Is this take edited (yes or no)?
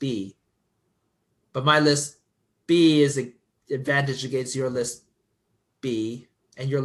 no